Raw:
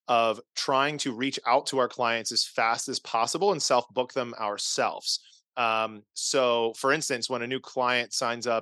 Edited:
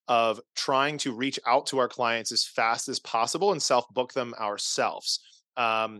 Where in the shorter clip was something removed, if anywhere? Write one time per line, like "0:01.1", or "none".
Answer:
none